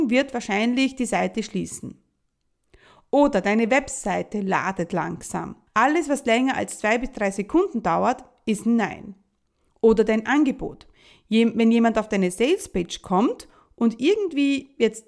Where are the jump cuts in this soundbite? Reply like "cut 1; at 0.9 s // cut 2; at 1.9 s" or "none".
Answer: cut 1; at 5.7 s